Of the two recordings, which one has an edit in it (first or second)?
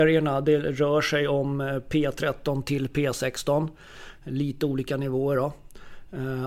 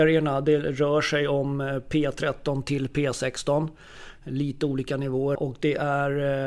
second